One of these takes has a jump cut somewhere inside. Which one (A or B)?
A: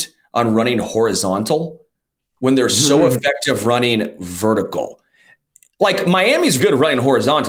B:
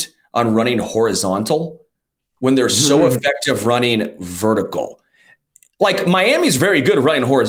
A